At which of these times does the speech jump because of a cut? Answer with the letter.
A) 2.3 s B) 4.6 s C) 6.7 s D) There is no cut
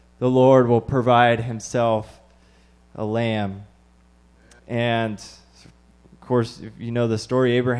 B